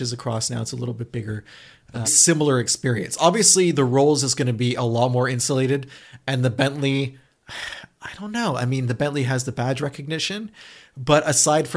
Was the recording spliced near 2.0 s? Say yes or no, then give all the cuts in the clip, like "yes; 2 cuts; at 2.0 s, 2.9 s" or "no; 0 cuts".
yes; 1 cut; at 2.0 s